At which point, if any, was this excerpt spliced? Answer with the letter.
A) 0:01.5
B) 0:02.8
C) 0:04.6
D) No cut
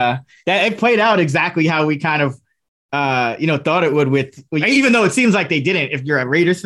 C